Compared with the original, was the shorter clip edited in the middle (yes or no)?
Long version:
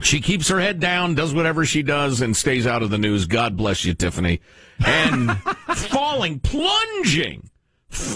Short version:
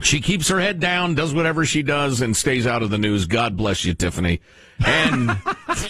no